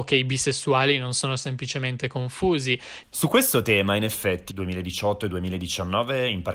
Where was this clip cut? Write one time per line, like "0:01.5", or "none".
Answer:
0:03.0
0:04.5